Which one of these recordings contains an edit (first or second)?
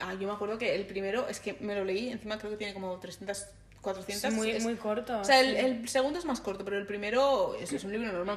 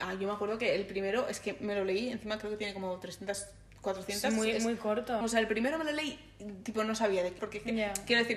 second